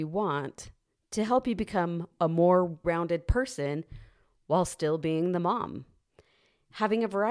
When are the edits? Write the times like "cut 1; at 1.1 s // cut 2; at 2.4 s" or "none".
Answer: cut 1; at 2.8 s